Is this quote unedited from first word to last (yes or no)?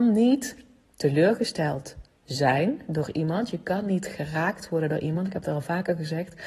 yes